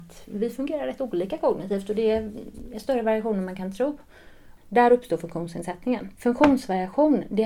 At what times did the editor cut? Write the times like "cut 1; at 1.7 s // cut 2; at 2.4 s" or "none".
cut 1; at 4.6 s // cut 2; at 6.2 s

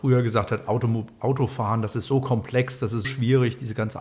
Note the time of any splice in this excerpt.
cut 1; at 3.0 s

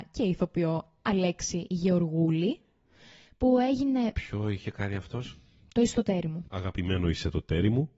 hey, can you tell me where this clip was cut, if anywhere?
cut 1; at 6.5 s

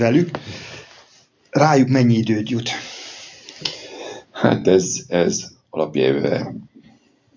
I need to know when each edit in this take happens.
none

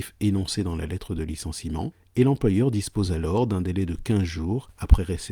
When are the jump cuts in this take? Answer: none

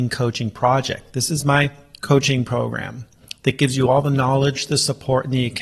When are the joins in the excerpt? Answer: none

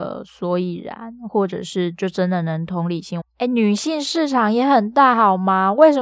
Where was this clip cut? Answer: cut 1; at 3.2 s

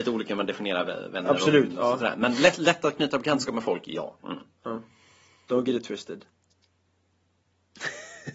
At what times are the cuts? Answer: cut 1; at 4.2 s

